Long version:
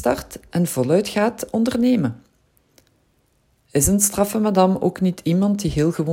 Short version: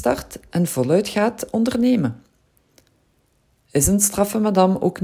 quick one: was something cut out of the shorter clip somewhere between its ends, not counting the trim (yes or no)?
no